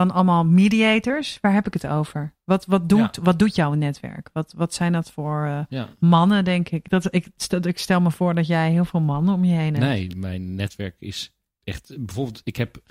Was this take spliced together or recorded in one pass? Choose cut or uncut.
uncut